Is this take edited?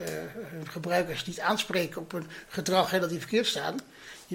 no; 0 cuts

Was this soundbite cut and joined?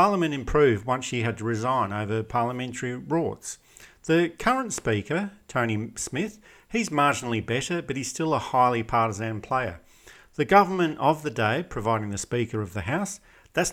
no; 0 cuts

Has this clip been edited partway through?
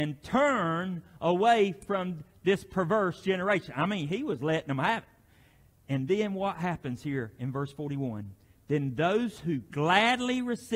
no; 0 cuts

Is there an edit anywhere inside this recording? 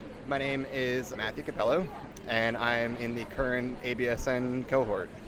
yes; 1 cut; at 1.2 s

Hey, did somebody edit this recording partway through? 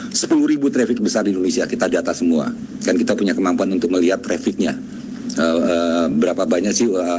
no; 0 cuts

